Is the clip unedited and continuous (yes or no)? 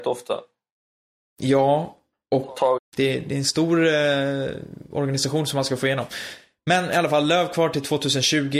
no